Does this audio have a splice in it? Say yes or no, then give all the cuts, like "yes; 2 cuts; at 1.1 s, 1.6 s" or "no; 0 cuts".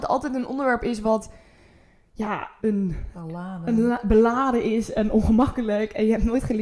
yes; 1 cut; at 2.6 s